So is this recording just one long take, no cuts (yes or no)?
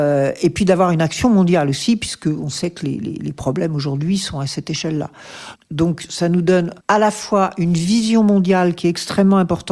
no